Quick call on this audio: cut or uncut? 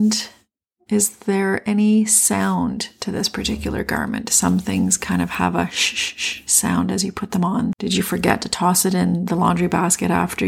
cut